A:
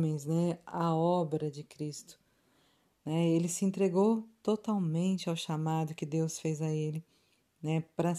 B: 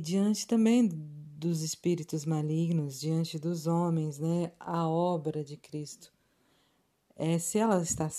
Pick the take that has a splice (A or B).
A